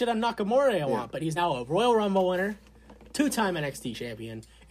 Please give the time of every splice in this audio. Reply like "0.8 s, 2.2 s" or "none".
none